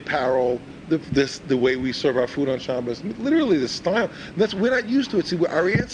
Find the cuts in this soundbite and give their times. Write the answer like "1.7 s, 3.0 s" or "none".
none